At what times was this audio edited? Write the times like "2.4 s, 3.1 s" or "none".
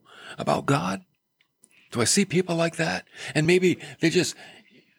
none